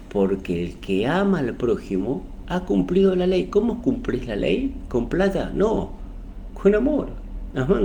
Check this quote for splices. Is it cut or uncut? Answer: uncut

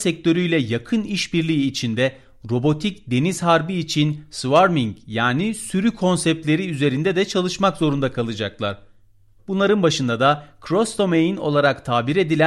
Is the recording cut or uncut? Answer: cut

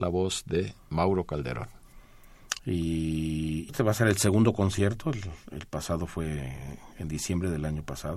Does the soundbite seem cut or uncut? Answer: cut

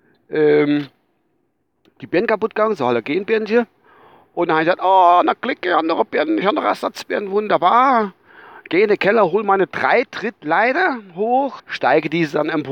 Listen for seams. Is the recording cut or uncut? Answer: cut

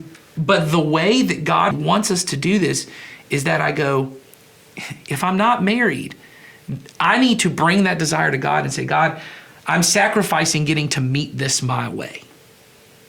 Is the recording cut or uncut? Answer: cut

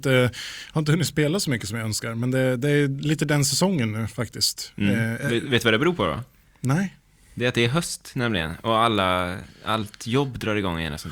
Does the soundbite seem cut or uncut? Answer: uncut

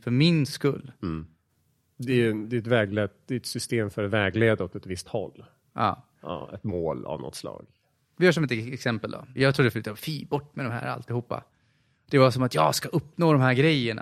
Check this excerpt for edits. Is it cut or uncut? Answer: cut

